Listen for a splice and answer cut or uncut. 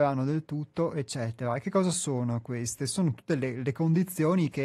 uncut